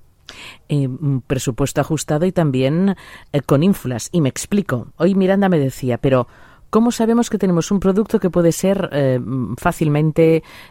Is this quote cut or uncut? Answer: uncut